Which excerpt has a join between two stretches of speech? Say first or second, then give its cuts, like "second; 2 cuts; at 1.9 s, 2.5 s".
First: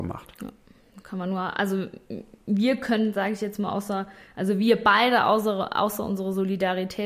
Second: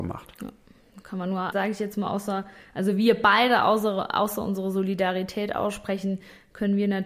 second; 1 cut; at 1.5 s